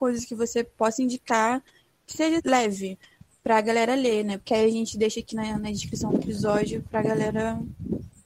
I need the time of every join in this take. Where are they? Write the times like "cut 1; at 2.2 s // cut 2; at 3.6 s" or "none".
cut 1; at 2.4 s // cut 2; at 4.4 s